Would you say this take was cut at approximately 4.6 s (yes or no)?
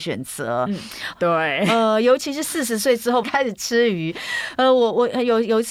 no